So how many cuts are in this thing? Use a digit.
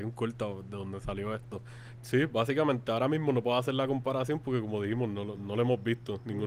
2